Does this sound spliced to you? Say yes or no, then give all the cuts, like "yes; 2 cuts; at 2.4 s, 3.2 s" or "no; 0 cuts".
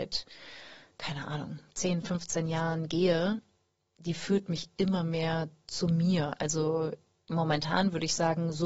no; 0 cuts